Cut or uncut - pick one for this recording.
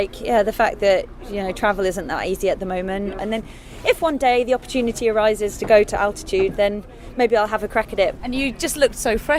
cut